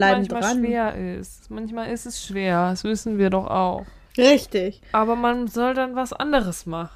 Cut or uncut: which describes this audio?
cut